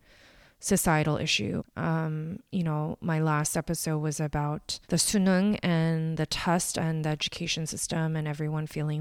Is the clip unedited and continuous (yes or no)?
no